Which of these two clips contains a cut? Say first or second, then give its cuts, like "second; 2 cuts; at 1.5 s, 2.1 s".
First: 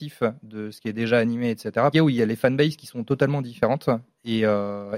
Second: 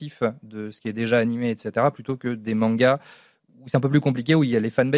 first; 1 cut; at 1.9 s